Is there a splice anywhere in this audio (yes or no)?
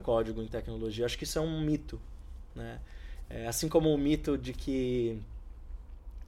no